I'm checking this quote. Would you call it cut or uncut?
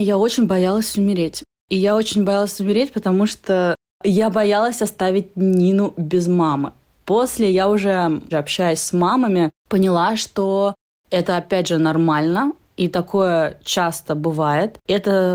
cut